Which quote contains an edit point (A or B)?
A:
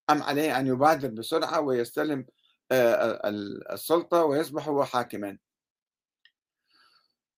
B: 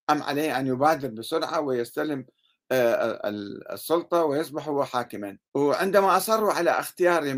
B